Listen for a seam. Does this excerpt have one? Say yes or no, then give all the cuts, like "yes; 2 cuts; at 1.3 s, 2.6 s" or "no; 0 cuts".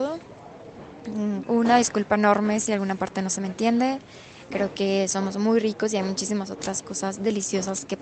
yes; 2 cuts; at 1.4 s, 4.5 s